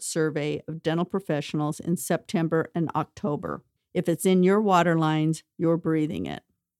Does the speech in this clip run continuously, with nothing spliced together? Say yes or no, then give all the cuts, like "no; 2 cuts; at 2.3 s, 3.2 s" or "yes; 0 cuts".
no; 1 cut; at 3.8 s